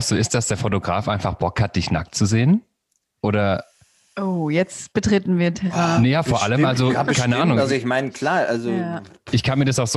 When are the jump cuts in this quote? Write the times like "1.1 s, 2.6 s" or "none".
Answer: none